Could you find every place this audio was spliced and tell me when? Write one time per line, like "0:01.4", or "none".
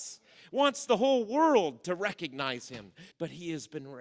0:03.1

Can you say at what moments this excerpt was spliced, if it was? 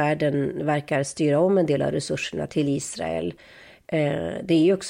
0:02.5

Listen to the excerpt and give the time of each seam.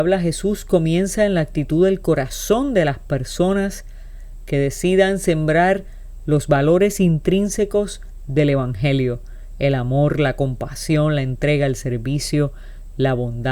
none

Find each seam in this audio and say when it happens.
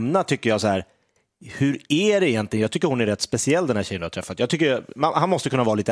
none

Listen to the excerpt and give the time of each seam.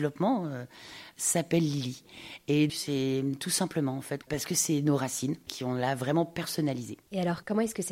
0:02.7
0:04.2

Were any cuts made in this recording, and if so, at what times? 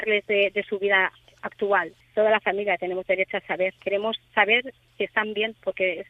0:02.0
0:03.8

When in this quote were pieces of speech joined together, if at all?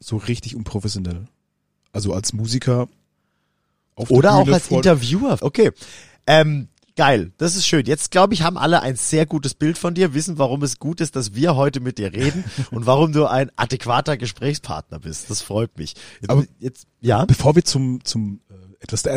0:05.4

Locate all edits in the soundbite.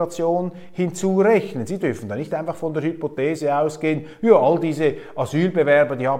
none

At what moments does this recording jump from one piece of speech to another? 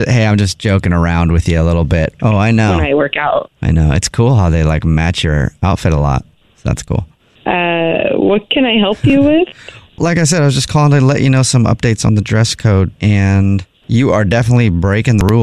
0:02.2
0:03.5
0:10.0

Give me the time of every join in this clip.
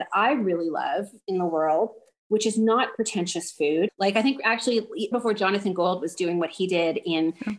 0:03.9
0:05.1

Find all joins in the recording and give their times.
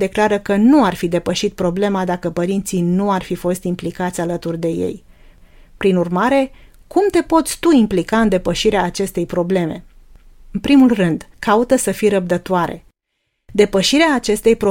0:11.3

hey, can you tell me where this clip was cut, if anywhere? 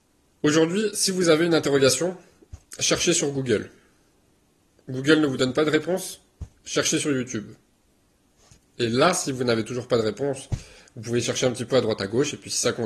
none

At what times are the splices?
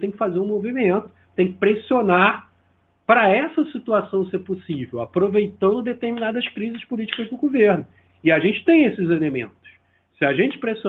none

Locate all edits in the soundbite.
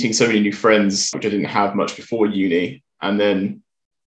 0:01.1

